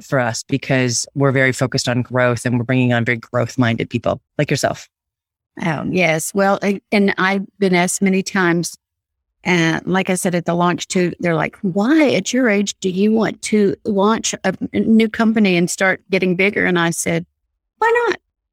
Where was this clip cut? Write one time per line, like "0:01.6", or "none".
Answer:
none